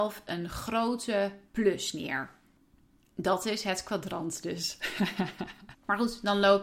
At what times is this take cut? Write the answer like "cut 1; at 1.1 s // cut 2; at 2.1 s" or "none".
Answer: cut 1; at 5.7 s